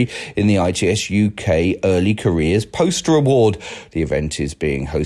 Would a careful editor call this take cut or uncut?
cut